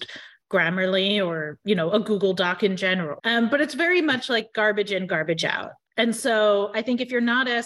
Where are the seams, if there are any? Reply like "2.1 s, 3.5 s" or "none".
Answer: 3.2 s